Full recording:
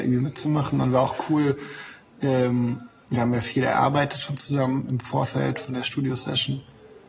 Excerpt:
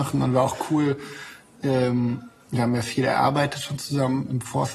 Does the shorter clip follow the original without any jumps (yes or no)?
yes